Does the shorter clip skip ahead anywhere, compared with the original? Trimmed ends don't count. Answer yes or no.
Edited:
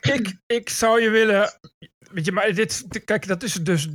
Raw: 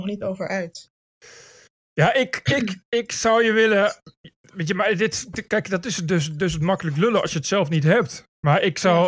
no